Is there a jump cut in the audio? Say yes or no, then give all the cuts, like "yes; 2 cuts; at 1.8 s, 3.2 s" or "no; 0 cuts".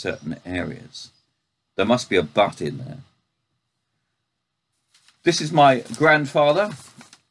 yes; 1 cut; at 1.7 s